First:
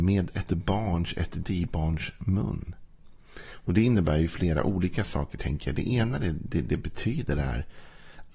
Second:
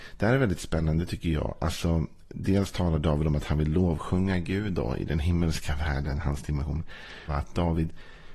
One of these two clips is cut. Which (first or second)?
second